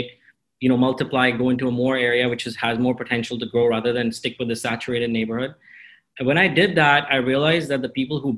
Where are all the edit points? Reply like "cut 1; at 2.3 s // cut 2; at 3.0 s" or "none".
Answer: none